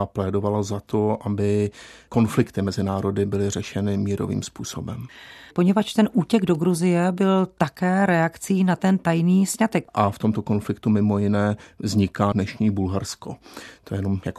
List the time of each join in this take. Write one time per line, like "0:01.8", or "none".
0:05.5
0:09.9
0:12.3